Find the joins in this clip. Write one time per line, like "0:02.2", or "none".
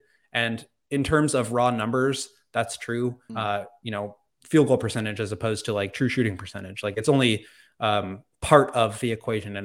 0:03.3